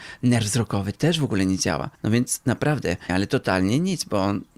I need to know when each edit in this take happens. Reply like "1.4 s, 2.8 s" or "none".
1.9 s, 3.1 s